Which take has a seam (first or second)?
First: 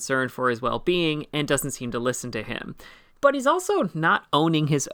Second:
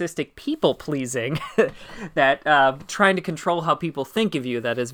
first